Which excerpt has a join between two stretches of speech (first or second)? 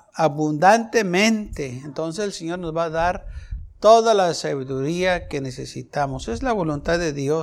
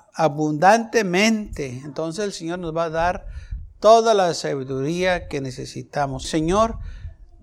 second